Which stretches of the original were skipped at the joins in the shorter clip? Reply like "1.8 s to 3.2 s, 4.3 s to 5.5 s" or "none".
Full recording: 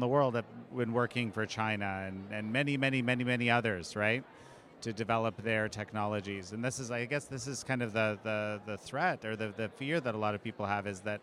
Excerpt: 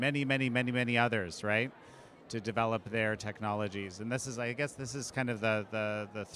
none